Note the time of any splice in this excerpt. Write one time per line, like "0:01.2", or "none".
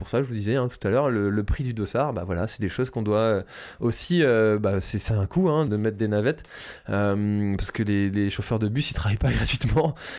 0:05.7